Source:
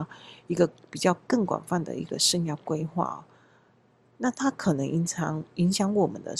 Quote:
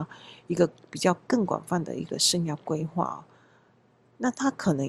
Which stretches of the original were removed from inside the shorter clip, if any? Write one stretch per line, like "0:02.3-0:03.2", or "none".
none